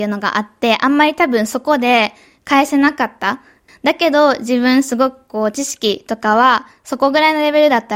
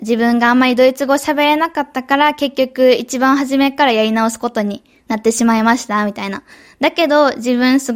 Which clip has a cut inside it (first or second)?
first